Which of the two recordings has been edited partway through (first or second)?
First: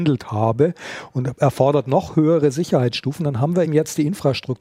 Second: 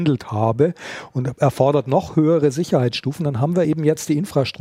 first